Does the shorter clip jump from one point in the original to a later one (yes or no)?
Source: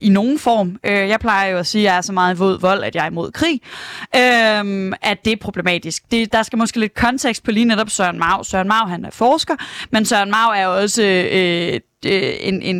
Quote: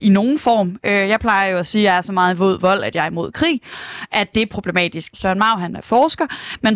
yes